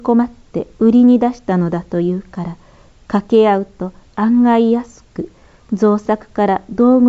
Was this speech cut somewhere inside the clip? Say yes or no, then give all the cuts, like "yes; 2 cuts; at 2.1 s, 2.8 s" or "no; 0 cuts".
no; 0 cuts